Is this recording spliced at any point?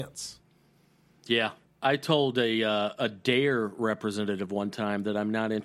yes; 1 cut; at 1.6 s

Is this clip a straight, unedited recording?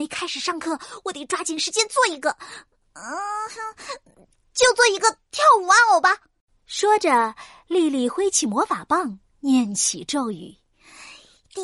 yes; 0 cuts

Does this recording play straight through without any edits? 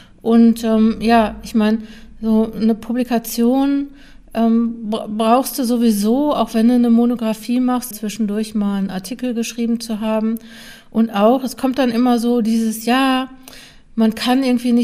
no; 1 cut; at 7.9 s

